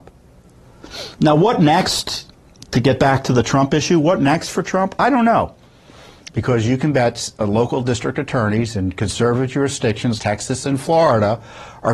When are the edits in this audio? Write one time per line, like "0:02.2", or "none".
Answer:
0:06.3
0:10.2